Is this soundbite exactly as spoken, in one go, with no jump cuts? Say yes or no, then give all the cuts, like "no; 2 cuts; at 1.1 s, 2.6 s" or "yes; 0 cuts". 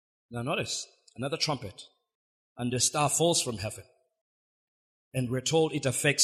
yes; 0 cuts